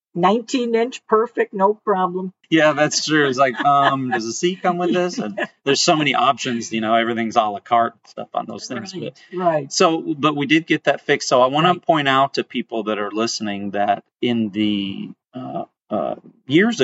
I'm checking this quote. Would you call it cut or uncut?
cut